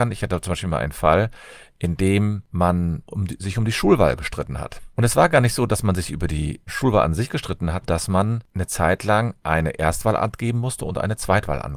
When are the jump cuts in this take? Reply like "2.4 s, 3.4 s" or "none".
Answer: 6.7 s, 7.8 s